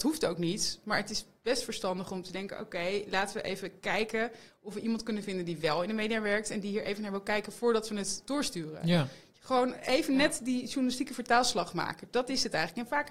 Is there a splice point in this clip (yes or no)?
no